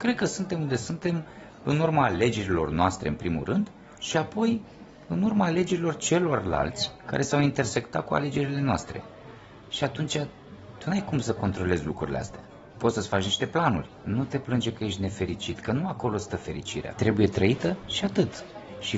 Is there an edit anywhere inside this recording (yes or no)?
yes